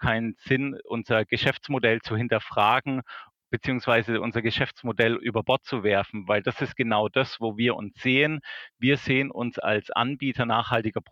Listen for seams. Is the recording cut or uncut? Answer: uncut